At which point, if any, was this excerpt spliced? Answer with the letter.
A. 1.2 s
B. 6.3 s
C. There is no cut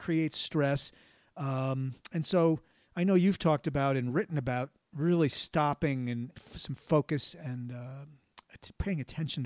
B